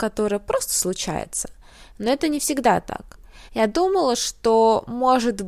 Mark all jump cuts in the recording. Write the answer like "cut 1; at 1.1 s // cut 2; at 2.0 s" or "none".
cut 1; at 3.5 s